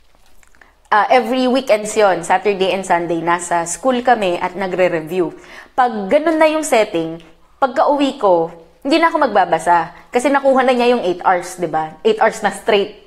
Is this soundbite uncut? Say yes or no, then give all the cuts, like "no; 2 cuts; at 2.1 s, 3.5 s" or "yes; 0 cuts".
yes; 0 cuts